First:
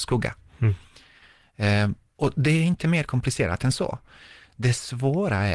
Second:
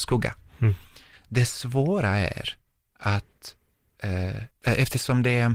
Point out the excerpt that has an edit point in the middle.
second; 2 cuts; at 1.1 s, 4.5 s

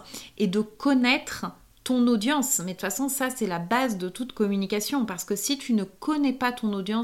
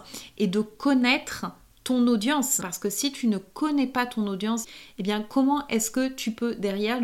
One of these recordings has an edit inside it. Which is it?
second; 2 cuts; at 2.6 s, 4.6 s

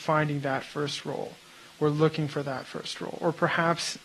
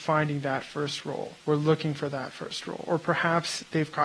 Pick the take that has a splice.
second; 1 cut; at 1.4 s

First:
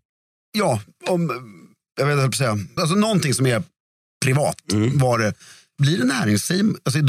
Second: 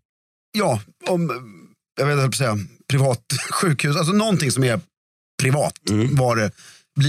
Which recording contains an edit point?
first; 1 cut; at 2.8 s

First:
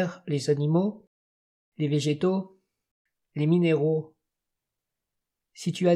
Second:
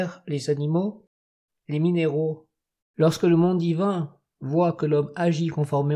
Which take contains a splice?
second; 2 cuts; at 1.5 s, 2.8 s

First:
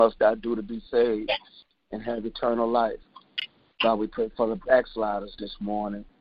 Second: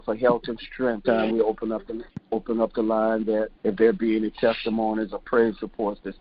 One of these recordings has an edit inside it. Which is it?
second; 2 cuts; at 1.0 s, 3.6 s

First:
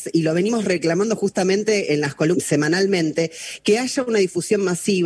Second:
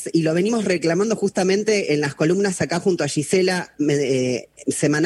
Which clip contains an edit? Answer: first; 1 cut; at 2.3 s

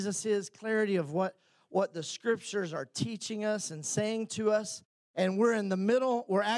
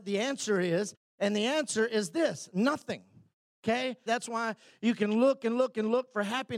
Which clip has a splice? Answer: second; 1 cut; at 4.1 s

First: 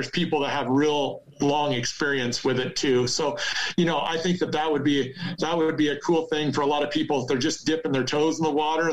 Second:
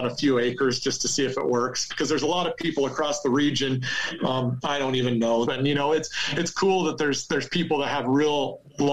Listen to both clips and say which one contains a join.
second; 3 cuts; at 1.9 s, 4.2 s, 5.5 s

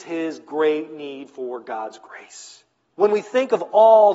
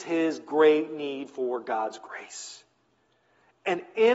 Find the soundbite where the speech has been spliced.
first; 1 cut; at 2.9 s

